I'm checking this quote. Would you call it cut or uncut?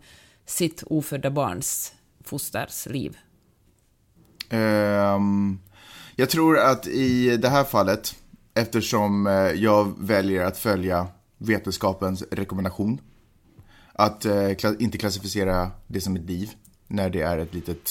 uncut